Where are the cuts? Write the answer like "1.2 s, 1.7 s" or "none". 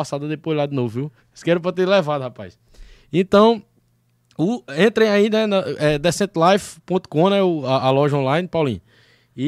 1.2 s